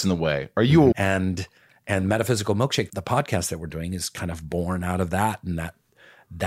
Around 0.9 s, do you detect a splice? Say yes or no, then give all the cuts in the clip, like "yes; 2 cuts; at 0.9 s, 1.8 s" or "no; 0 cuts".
yes; 2 cuts; at 0.9 s, 2.9 s